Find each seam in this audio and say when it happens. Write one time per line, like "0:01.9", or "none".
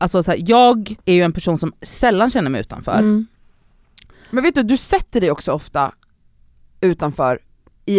0:01.0

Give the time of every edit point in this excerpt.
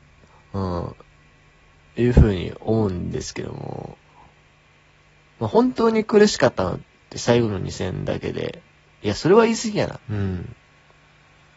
0:10.0

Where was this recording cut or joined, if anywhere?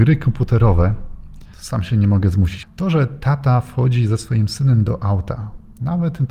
0:01.5
0:02.6

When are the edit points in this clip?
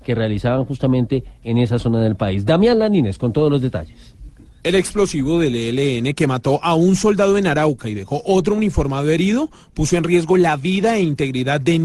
none

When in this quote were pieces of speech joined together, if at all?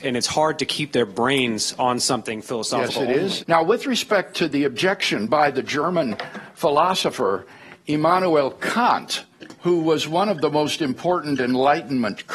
0:03.4
0:09.6

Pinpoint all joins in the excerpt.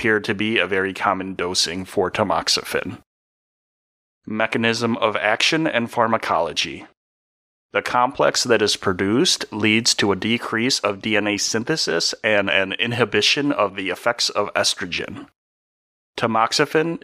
0:07.6

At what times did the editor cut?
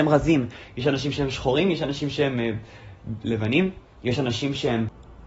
0:03.2

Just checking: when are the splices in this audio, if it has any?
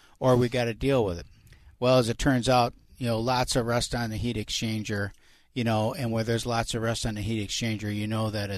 none

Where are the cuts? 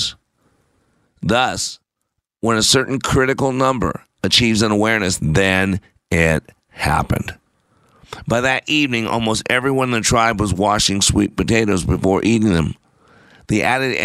0:05.2

